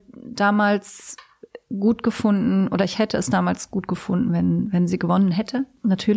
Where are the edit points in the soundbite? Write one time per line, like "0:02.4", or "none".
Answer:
none